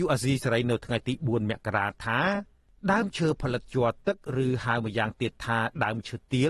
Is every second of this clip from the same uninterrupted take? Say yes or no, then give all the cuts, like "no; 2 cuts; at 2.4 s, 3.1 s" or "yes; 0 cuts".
yes; 0 cuts